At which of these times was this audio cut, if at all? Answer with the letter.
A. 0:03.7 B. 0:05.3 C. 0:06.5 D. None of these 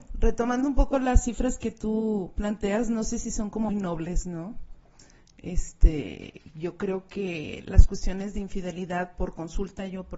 A